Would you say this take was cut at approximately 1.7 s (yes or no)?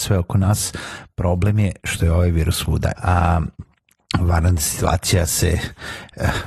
no